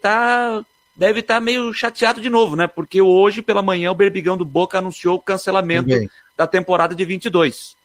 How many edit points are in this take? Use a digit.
0